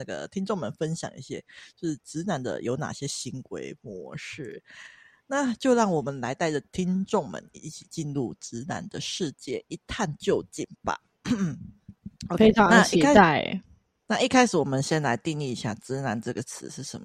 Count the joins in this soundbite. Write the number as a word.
one